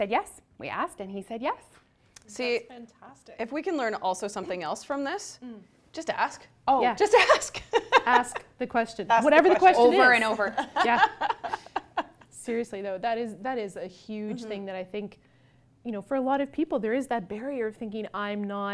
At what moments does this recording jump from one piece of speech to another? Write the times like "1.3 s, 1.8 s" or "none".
none